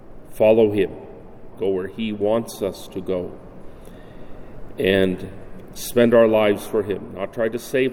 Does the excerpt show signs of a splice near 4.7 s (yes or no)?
no